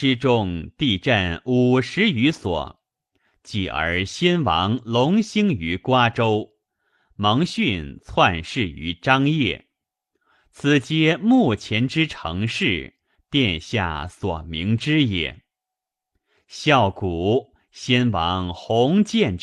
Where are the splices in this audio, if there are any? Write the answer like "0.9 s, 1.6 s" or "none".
none